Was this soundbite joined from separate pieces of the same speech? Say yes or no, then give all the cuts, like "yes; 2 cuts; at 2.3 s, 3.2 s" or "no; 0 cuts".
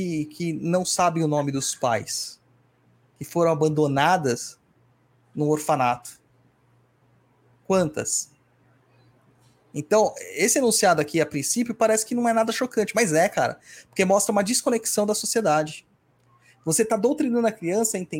no; 0 cuts